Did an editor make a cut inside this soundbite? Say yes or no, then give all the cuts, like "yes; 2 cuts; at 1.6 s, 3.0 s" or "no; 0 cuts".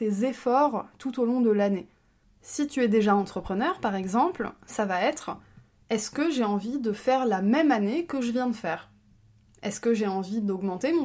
yes; 1 cut; at 2.2 s